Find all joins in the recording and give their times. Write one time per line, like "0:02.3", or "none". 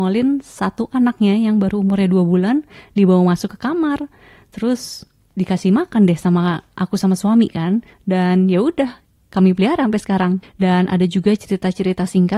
0:07.9
0:10.4